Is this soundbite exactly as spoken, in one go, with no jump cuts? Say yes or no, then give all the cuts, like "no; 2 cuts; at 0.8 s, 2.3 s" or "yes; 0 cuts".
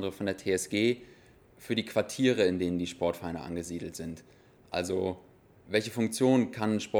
yes; 0 cuts